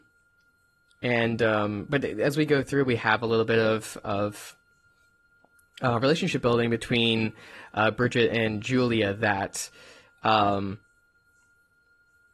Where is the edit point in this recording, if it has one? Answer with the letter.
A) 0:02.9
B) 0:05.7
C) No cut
C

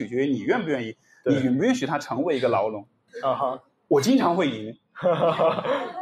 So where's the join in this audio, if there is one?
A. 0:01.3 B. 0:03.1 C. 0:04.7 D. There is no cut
B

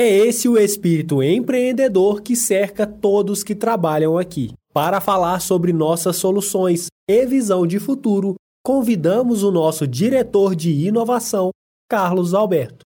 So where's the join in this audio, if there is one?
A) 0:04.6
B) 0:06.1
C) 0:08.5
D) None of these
A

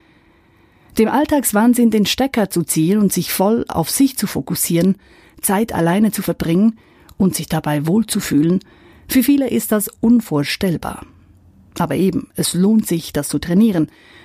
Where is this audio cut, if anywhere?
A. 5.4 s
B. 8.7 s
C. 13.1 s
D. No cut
D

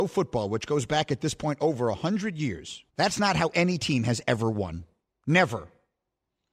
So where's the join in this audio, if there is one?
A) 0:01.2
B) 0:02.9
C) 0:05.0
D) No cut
B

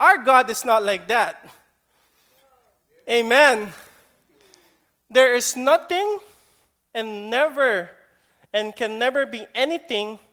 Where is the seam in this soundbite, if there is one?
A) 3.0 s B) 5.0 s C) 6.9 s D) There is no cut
B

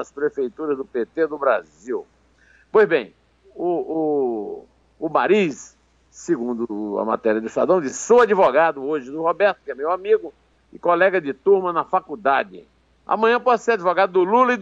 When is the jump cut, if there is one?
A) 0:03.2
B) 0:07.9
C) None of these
C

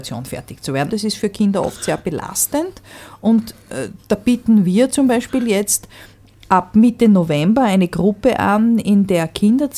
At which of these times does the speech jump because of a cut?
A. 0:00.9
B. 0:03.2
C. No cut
A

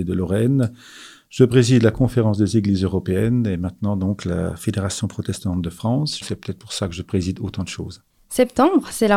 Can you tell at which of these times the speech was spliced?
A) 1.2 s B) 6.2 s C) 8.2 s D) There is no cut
B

